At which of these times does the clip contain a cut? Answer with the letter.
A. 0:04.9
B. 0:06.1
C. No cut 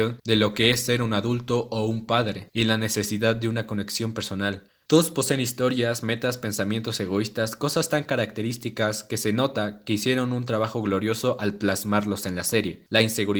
A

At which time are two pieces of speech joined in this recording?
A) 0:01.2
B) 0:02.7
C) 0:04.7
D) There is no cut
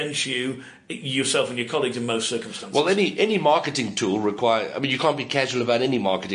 D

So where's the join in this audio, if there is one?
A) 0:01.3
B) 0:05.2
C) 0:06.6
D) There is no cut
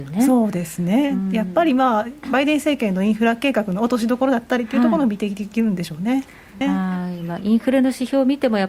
C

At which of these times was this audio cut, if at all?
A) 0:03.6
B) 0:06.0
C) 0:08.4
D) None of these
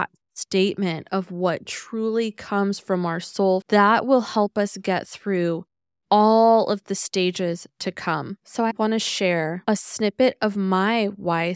A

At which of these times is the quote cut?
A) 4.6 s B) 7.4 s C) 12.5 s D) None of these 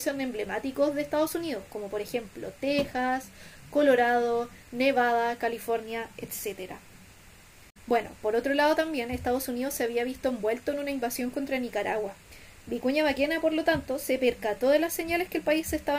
D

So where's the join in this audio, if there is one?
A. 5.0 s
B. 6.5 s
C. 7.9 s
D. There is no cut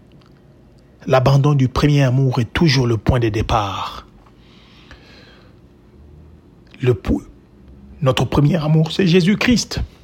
D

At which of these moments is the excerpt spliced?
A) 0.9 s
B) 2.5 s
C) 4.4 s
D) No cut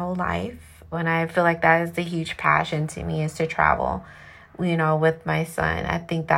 A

